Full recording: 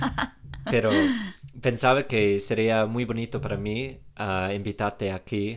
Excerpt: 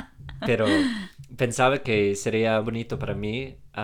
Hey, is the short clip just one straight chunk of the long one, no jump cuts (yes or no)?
no